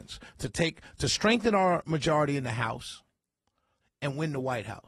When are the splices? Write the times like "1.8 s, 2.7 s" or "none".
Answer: 3.8 s